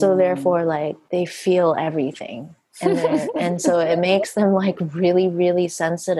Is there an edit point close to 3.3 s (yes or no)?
no